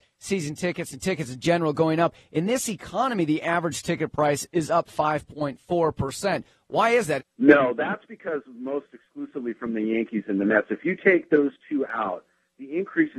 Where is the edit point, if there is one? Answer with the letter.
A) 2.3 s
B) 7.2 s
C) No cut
B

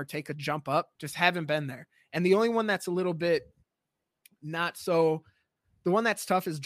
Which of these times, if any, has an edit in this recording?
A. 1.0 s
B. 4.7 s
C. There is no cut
A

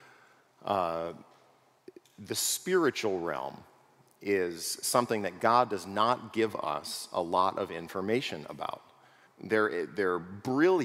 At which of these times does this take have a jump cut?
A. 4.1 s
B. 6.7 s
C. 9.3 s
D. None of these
C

